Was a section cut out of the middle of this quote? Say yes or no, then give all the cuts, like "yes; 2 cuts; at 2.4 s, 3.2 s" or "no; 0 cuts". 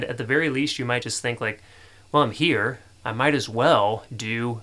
no; 0 cuts